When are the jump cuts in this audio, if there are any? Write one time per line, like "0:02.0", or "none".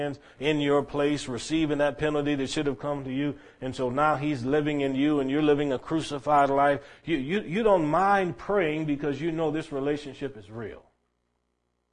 none